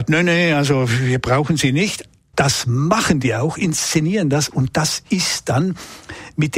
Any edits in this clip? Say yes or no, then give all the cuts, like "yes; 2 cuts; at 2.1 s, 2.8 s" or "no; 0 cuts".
yes; 1 cut; at 2.3 s